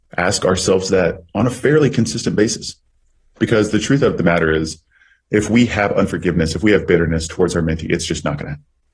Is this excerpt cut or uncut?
uncut